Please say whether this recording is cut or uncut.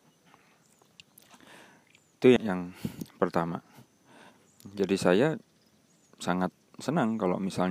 cut